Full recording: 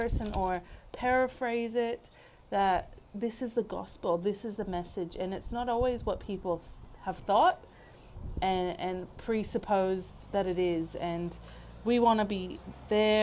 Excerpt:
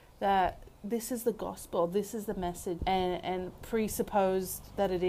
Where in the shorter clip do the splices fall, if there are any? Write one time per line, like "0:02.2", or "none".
0:02.8